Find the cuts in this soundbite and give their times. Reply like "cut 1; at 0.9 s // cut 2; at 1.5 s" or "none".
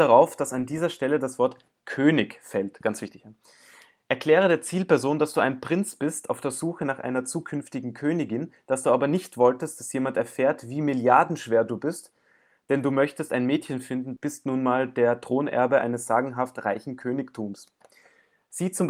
cut 1; at 14.2 s